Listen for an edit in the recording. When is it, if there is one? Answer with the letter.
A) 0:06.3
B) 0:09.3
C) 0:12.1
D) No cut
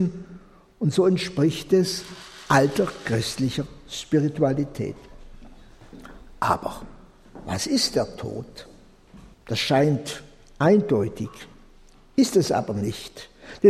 B